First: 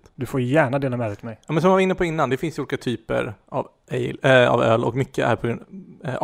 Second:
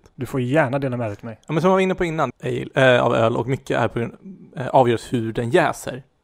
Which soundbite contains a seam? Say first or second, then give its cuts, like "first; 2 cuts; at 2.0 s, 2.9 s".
second; 1 cut; at 2.3 s